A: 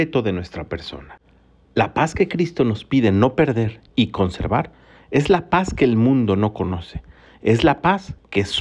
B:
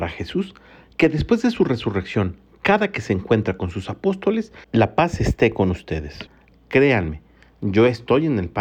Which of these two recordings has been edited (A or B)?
B